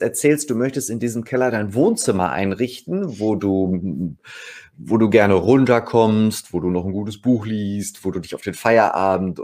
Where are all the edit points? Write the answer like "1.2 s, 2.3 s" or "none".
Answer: none